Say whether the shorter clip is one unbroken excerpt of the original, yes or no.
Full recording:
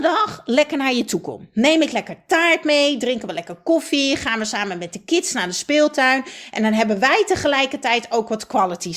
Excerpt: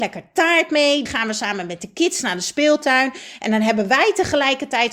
no